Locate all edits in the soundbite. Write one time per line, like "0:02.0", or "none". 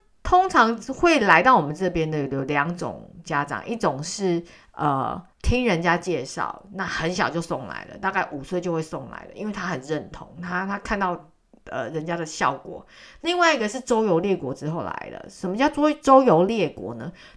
0:05.3